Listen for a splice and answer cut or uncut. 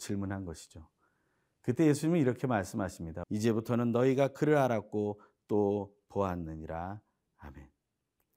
cut